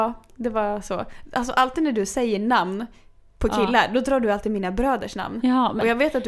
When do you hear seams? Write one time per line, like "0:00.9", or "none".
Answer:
none